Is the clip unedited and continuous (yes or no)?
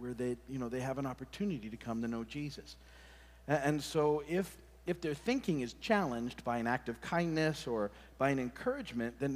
yes